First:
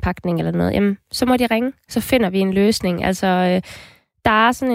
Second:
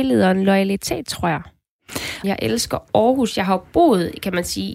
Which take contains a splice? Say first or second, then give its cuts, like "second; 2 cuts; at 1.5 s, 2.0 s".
second; 1 cut; at 2.2 s